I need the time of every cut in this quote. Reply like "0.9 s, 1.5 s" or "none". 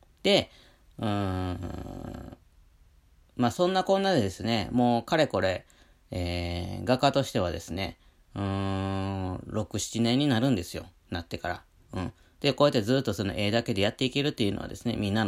none